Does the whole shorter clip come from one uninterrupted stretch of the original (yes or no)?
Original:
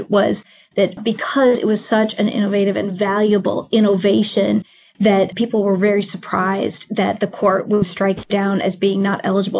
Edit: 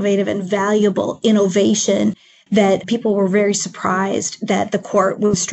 yes